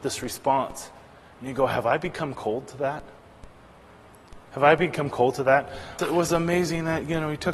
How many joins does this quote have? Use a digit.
1